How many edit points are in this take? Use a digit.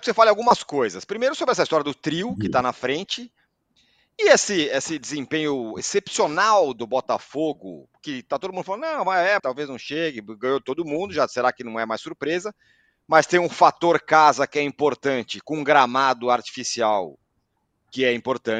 1